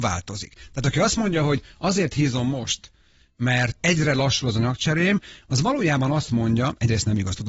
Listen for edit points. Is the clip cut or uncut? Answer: uncut